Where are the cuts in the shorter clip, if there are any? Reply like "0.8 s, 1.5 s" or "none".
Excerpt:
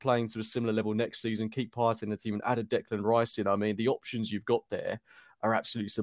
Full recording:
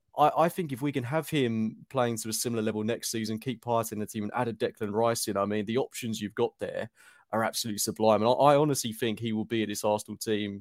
none